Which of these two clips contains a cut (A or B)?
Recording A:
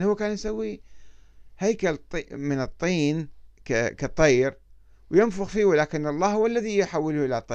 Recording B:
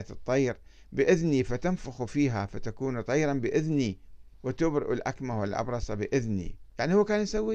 B